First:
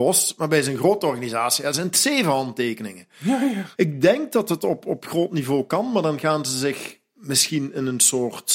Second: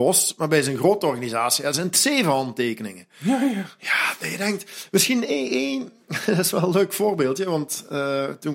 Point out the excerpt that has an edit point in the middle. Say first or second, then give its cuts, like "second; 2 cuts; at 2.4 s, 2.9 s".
first; 1 cut; at 3.7 s